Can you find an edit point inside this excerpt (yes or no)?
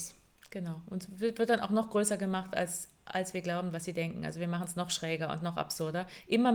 no